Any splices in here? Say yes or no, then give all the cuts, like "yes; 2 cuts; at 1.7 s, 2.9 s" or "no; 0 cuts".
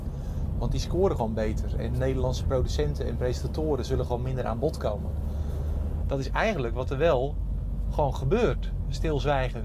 yes; 2 cuts; at 1.9 s, 6.0 s